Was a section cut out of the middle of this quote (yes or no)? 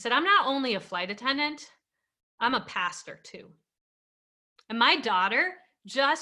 no